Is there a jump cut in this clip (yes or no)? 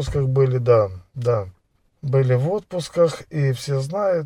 no